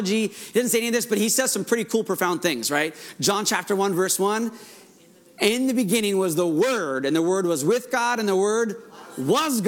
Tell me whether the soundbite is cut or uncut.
uncut